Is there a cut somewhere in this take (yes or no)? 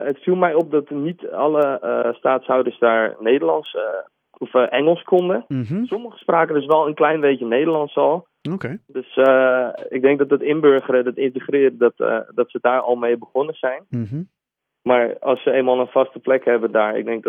no